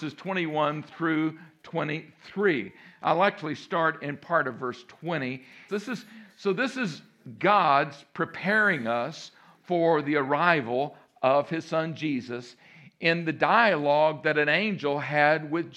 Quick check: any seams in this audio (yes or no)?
yes